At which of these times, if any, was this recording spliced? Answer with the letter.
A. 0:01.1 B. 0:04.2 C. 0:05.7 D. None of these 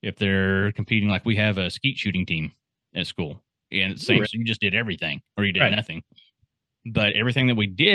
B